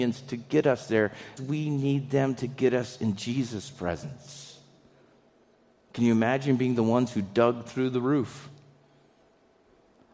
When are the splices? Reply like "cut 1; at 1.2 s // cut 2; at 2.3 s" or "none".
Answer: cut 1; at 1.4 s // cut 2; at 5.8 s